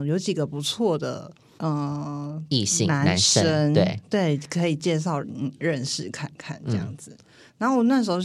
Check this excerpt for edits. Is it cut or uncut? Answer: cut